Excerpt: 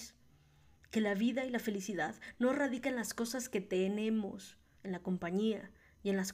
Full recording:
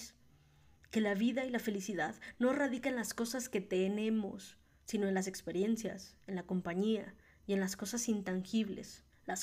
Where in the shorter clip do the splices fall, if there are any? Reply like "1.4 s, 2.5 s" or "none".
4.8 s